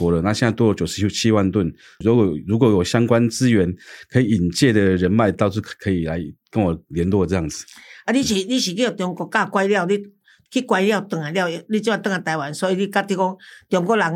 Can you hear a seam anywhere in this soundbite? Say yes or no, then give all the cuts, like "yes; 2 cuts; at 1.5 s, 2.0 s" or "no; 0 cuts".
yes; 1 cut; at 2.0 s